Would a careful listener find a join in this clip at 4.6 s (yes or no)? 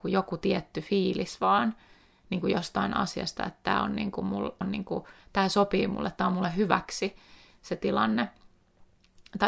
yes